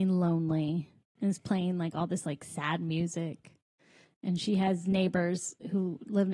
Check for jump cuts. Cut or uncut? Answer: uncut